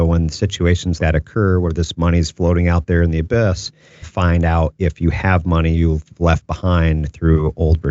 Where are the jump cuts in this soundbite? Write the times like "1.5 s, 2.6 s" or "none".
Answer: 1.0 s, 4.0 s